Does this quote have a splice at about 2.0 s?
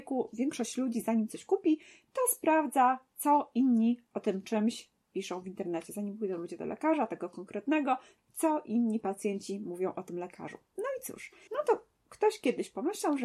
no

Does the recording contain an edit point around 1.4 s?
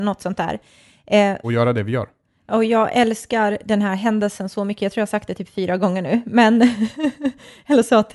yes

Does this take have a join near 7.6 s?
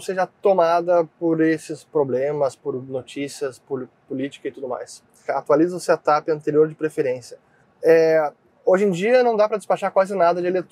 yes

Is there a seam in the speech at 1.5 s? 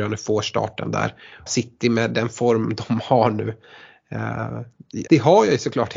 yes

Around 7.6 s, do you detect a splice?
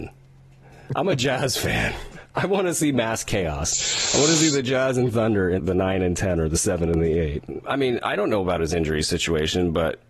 yes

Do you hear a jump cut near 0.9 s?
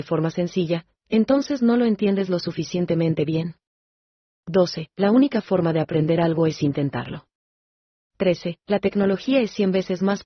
no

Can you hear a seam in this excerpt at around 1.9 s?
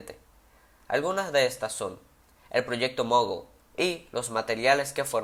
no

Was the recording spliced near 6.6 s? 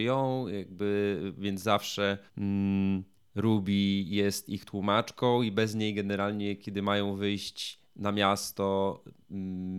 no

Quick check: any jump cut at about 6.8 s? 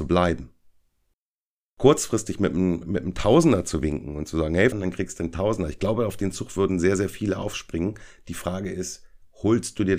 no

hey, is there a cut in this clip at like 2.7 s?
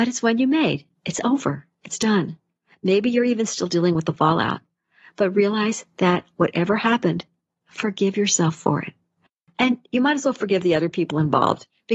no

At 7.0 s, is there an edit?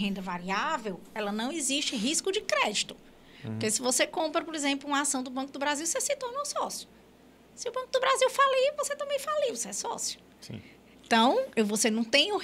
no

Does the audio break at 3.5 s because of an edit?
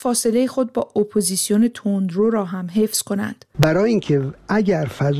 yes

